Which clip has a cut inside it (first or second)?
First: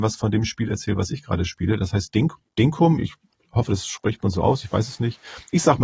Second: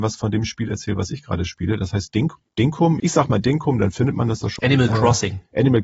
second